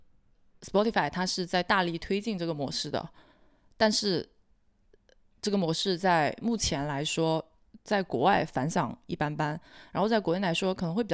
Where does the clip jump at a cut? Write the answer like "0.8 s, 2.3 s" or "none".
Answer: none

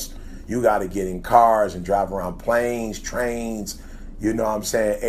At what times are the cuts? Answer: none

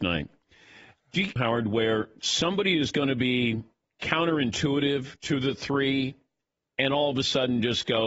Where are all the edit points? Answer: 1.4 s

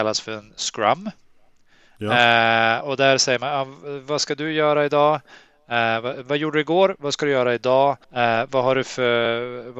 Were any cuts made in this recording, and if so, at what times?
2.8 s, 8.0 s

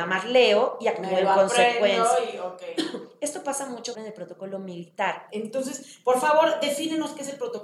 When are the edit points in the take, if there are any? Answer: 3.9 s, 5.3 s

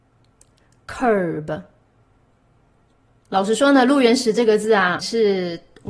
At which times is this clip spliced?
5.0 s

